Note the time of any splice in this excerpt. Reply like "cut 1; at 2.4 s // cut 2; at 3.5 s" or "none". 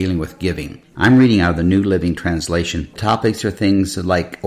cut 1; at 0.9 s // cut 2; at 2.9 s

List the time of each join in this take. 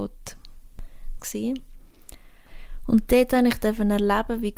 cut 1; at 1.2 s

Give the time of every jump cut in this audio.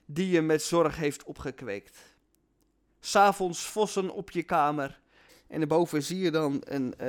cut 1; at 5.3 s

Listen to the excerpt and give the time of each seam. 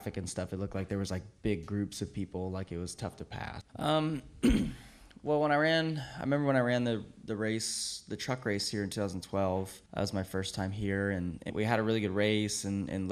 cut 1; at 3.6 s // cut 2; at 9.9 s // cut 3; at 11.5 s

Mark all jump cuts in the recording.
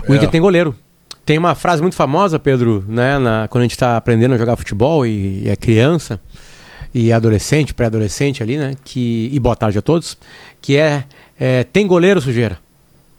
cut 1; at 1.2 s

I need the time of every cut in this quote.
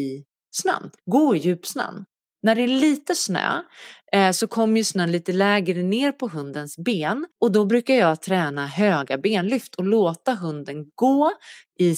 cut 1; at 1.0 s // cut 2; at 7.3 s

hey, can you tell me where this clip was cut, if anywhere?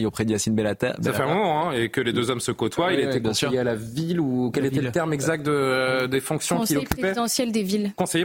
none

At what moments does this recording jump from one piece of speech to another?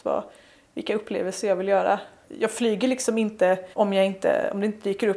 cut 1; at 2.2 s // cut 2; at 3.7 s

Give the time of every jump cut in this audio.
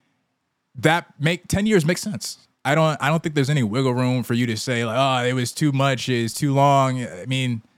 none

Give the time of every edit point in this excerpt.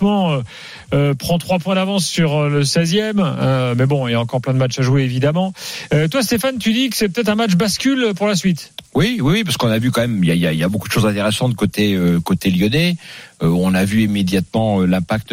none

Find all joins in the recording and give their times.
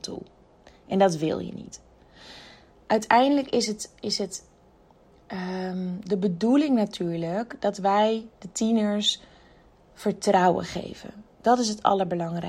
cut 1; at 11.3 s

